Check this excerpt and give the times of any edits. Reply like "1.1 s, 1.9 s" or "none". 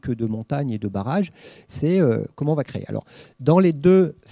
1.7 s